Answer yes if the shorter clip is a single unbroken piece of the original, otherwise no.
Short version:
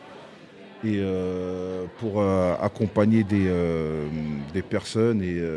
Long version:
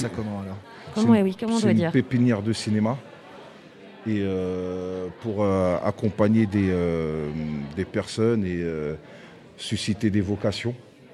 yes